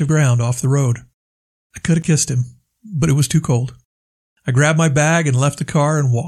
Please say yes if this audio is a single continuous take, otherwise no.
yes